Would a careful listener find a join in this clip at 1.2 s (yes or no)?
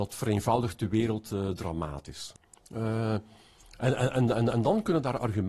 no